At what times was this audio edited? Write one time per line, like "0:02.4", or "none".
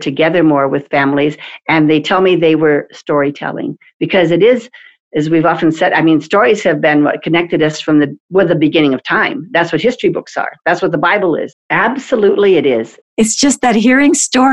0:11.5
0:13.0

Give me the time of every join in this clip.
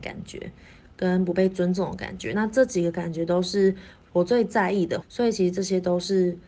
none

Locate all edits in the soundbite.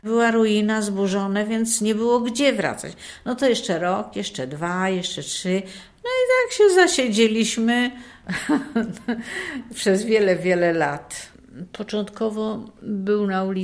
none

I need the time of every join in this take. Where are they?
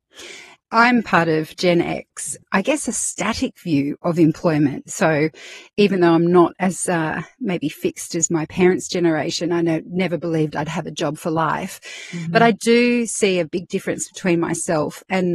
0:02.4

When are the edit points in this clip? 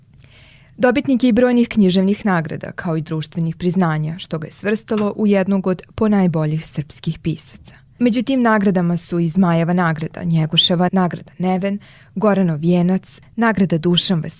0:10.9
0:13.2

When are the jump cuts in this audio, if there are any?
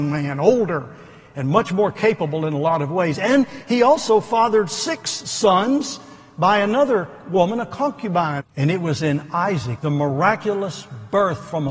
0:08.4
0:09.8

